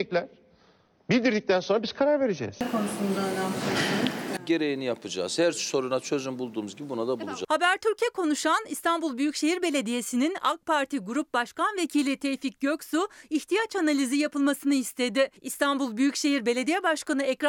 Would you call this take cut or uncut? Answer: uncut